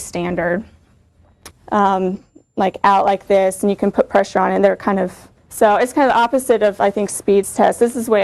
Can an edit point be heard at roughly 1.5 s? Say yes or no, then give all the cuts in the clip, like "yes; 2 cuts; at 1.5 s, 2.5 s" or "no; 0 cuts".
yes; 2 cuts; at 1.5 s, 5.4 s